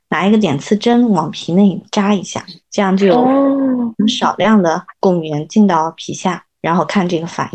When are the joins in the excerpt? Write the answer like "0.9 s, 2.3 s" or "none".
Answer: 2.6 s, 6.5 s